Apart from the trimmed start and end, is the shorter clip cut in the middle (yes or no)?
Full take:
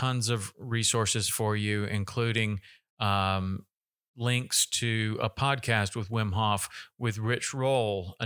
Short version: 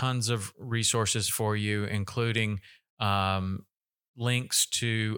no